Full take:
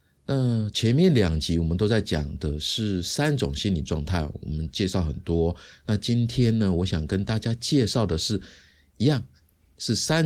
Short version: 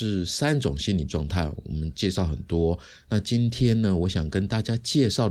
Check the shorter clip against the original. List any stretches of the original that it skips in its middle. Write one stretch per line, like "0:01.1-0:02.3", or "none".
none